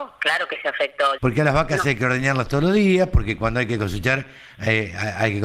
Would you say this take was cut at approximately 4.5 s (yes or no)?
no